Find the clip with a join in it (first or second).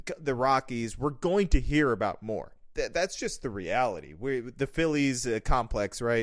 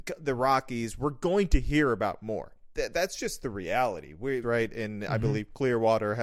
second